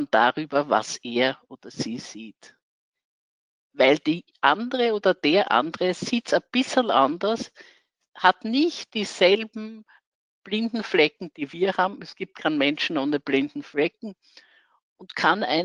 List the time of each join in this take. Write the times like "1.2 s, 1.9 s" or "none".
none